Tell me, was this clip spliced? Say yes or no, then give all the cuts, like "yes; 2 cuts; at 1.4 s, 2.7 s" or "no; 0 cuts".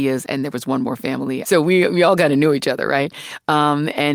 yes; 1 cut; at 1.4 s